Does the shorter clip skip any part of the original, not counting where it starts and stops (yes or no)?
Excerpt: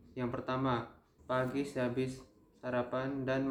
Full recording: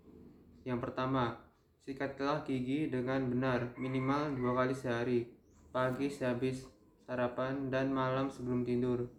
yes